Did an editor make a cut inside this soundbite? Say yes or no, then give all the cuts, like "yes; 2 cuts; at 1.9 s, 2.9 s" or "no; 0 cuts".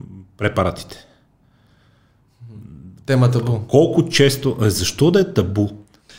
no; 0 cuts